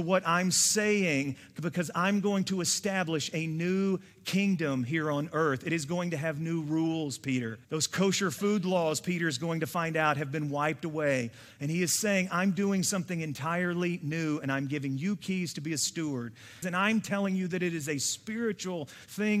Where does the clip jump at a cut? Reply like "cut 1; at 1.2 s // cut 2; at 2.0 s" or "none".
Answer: cut 1; at 7.6 s // cut 2; at 16.6 s